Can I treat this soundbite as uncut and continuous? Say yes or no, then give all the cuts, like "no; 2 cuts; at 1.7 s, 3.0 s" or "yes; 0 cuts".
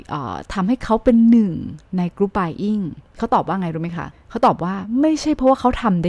no; 1 cut; at 4.1 s